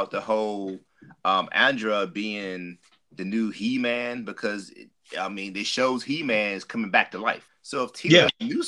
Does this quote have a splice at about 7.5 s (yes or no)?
yes